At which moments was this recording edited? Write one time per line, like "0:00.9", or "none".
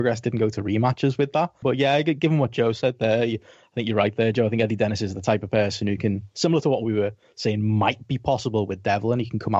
0:01.6